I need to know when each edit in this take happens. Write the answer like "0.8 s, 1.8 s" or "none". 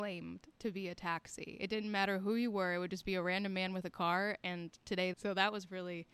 5.1 s